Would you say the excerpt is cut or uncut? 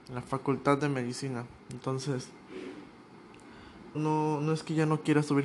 cut